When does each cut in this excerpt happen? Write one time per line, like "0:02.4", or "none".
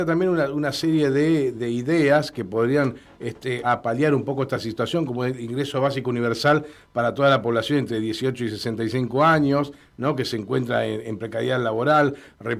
0:01.5
0:03.6